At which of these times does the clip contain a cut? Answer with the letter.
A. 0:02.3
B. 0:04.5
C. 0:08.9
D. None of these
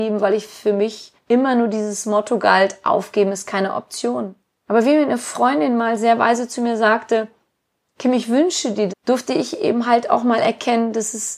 C